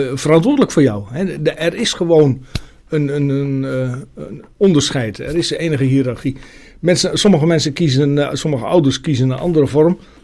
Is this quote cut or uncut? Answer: uncut